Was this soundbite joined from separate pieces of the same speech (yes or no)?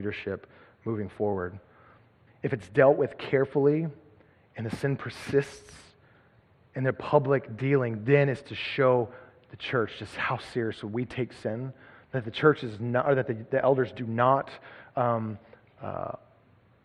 yes